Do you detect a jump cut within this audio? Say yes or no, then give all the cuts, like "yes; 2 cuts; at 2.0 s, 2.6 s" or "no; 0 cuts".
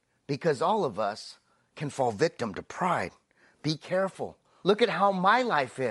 yes; 1 cut; at 4.6 s